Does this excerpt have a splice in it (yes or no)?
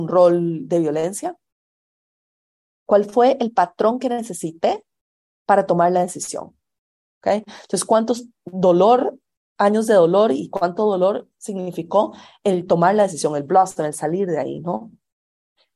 yes